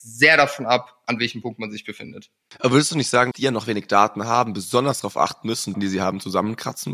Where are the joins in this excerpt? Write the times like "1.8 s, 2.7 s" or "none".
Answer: 3.3 s, 5.7 s